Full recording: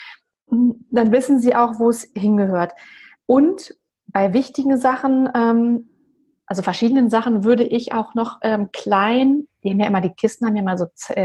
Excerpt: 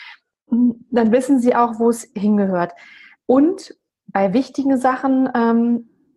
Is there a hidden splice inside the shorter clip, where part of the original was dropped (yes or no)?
no